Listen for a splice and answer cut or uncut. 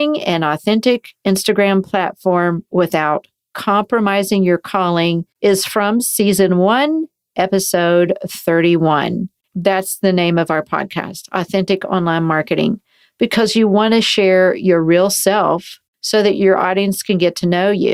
uncut